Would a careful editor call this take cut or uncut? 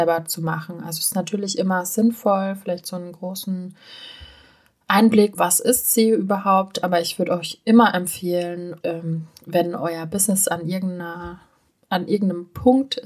cut